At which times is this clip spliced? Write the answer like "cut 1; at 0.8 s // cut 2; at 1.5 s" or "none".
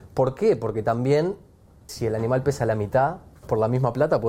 cut 1; at 1.9 s